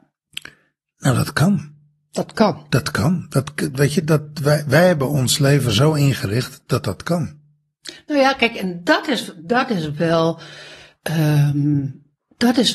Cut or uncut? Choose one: uncut